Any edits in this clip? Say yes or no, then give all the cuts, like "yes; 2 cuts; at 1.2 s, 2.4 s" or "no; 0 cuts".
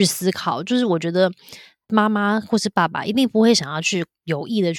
no; 0 cuts